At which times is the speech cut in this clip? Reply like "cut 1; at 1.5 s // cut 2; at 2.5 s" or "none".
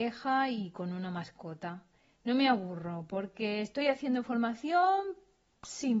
none